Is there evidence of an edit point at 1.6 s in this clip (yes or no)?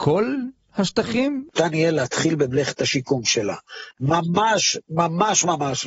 yes